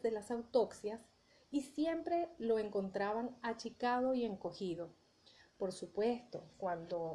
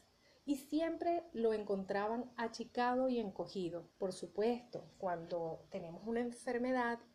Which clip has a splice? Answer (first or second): second